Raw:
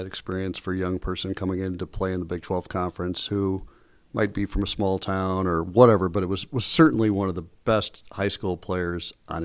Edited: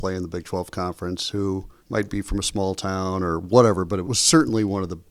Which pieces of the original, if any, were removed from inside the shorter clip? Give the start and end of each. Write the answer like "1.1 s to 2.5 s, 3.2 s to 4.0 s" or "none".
3.8 s to 4.0 s, 6.3 s to 6.5 s

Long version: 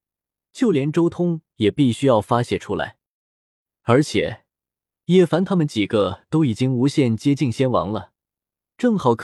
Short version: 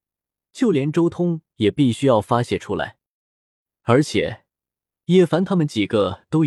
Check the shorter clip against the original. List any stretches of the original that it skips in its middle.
none

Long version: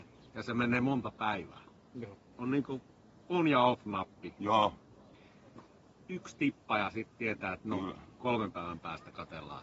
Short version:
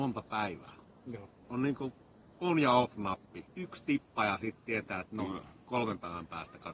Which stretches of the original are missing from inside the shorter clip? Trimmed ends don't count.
4.3 s to 6.0 s

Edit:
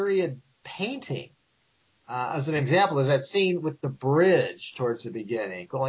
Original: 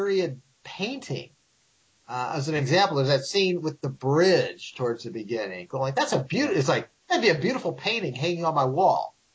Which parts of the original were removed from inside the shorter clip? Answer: none

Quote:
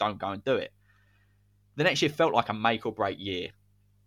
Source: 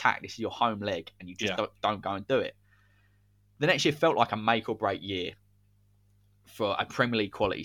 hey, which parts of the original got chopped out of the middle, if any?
none

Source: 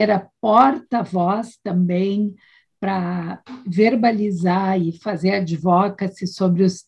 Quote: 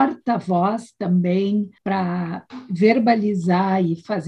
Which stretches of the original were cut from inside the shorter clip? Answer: 2.4 s to 2.7 s

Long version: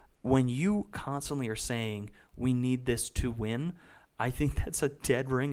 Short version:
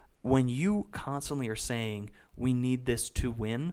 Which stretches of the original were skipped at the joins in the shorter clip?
none

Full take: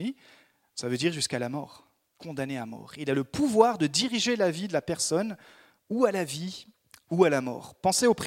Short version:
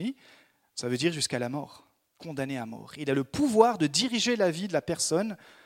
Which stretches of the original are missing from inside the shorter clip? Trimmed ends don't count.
none

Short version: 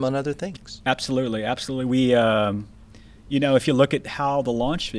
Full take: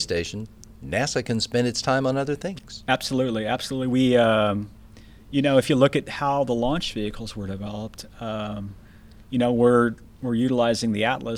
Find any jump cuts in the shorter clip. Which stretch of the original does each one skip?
none

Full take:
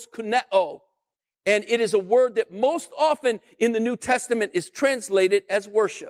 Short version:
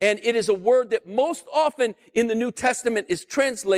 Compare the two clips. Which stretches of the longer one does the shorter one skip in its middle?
none

